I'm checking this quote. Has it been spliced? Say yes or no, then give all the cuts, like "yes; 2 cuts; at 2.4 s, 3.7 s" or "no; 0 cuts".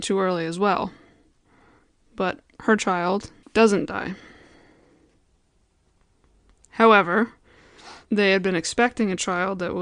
yes; 2 cuts; at 3.4 s, 8.1 s